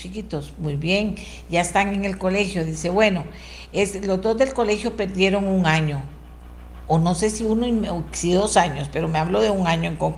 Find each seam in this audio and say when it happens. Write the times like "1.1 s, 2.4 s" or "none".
none